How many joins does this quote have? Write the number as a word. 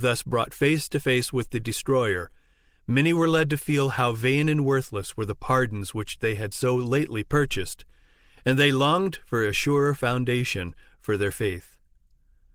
zero